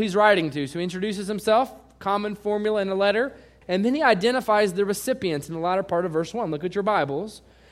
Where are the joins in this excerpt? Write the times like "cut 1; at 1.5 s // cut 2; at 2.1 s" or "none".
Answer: cut 1; at 3.6 s